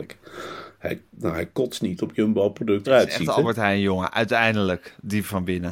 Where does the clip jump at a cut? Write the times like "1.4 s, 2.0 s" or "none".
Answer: 1.1 s, 2.9 s